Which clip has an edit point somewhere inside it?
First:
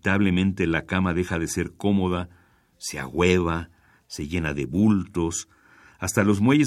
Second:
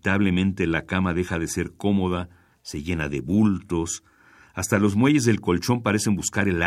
second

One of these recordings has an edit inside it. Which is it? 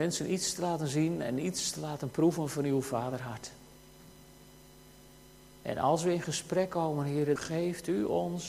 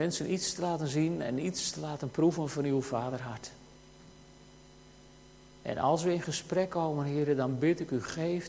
first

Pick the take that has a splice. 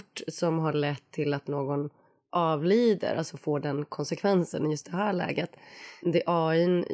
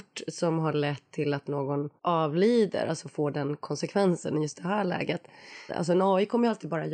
second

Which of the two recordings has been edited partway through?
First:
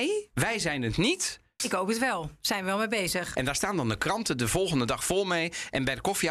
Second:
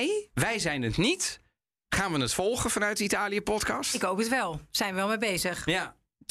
first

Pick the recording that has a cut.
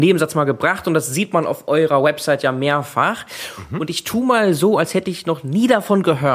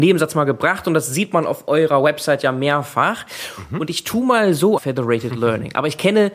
second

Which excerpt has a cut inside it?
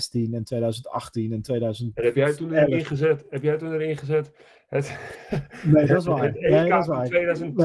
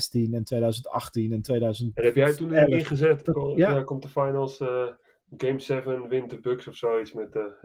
second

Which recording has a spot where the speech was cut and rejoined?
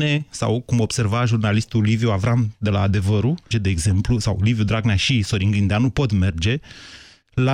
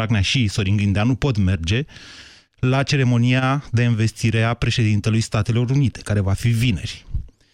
first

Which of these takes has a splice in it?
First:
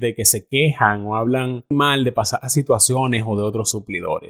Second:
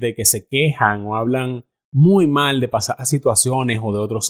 first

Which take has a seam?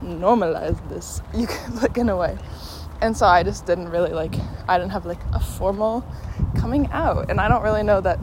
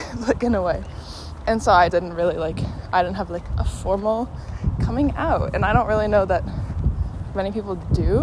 second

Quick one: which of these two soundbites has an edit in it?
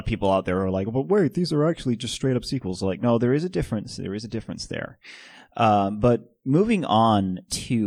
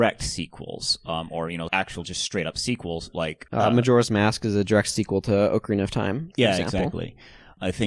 second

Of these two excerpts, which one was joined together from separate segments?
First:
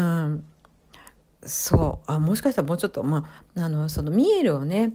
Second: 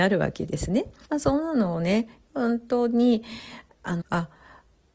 second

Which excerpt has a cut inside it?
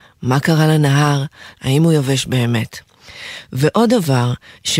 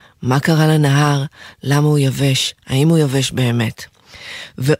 first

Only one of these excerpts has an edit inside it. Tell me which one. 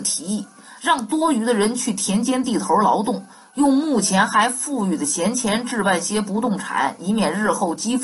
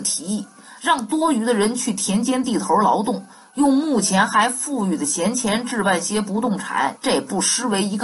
second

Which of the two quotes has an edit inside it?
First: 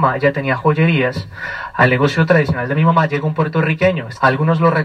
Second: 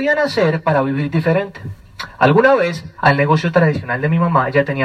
second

